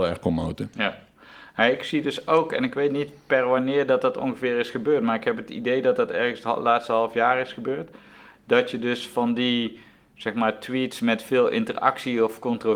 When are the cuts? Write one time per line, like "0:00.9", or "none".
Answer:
none